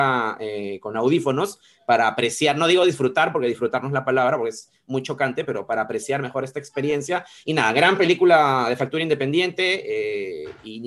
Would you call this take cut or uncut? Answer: uncut